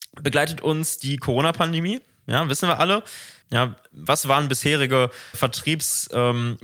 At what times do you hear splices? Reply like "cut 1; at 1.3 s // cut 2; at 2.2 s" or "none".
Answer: cut 1; at 3.4 s // cut 2; at 5.3 s